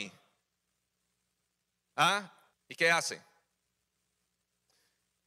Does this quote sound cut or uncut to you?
cut